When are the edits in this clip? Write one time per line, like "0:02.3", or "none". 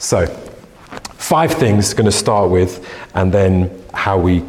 none